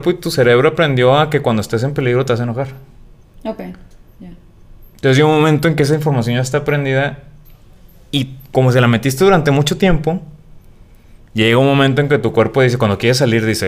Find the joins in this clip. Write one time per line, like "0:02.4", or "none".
none